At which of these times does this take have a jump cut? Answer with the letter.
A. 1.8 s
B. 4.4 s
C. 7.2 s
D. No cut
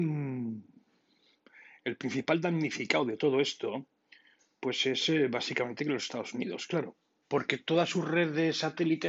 C